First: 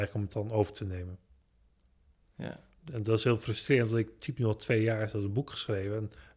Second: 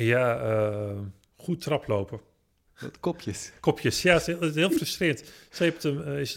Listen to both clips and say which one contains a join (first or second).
second